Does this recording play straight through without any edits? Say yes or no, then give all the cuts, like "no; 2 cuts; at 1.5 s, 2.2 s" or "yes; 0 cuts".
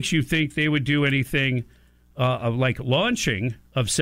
yes; 0 cuts